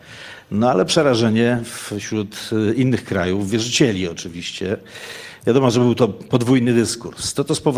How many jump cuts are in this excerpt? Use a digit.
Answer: 0